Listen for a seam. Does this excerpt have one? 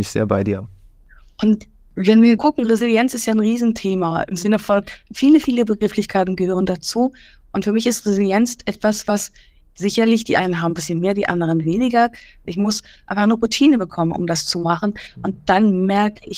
yes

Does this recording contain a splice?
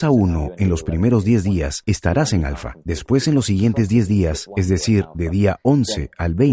no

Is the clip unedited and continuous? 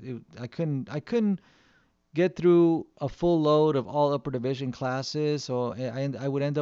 yes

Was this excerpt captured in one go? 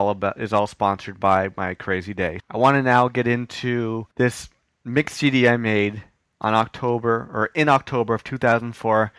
no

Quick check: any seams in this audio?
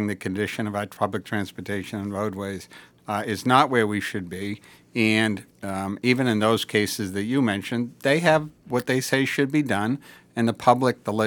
no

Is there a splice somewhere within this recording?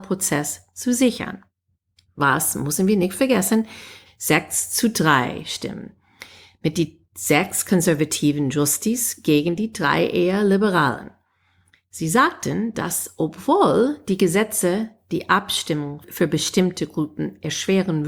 yes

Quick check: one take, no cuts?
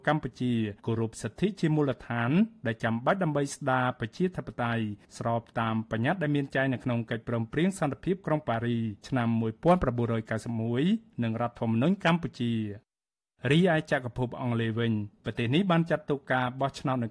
yes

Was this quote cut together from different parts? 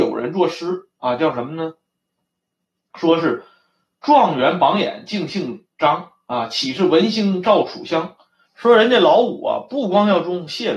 yes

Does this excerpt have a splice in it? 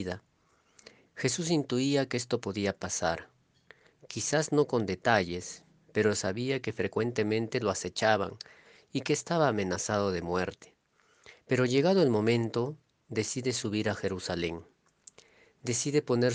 yes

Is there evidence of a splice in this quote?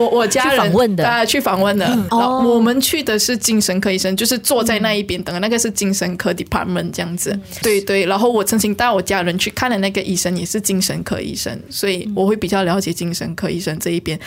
yes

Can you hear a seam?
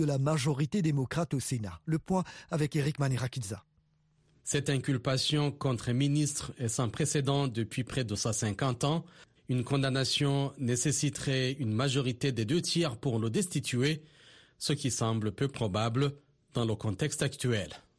yes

